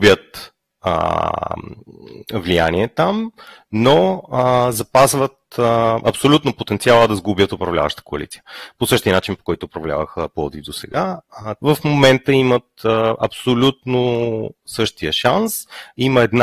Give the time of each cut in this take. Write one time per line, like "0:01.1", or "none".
0:11.6